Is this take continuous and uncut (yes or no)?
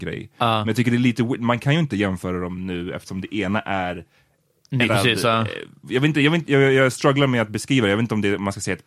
no